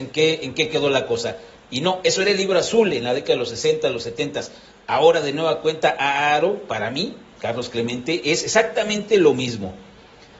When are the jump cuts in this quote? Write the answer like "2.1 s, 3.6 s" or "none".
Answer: none